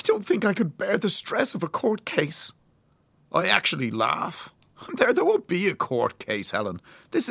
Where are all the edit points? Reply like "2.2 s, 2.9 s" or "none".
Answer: none